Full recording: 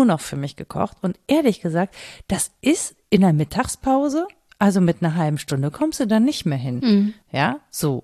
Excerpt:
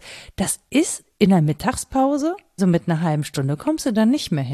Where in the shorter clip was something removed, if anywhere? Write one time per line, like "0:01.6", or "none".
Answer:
0:02.6